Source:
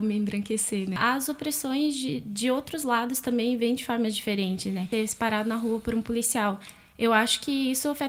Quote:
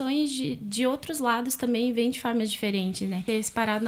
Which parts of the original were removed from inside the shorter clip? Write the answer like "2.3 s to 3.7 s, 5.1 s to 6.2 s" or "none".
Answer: none